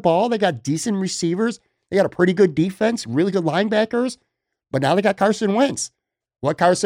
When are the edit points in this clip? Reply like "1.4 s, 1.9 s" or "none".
none